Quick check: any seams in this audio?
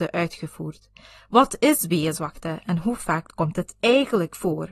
no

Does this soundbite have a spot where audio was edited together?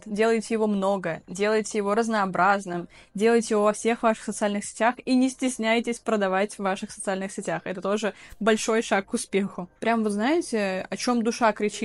no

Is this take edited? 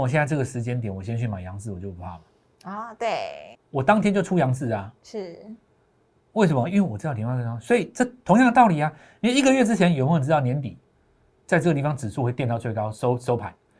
yes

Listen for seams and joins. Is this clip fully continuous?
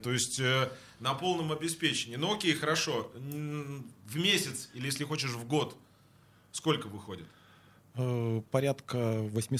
yes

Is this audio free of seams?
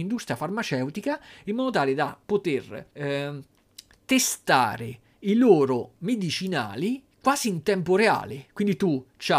no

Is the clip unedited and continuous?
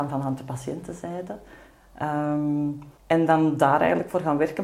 no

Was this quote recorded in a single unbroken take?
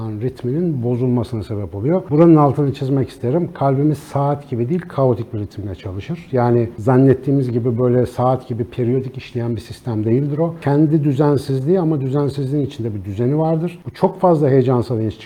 yes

